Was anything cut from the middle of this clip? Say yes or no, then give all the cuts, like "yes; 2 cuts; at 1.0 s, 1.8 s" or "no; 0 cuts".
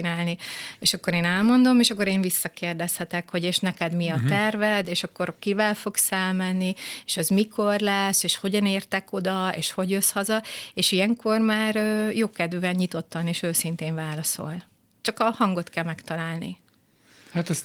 no; 0 cuts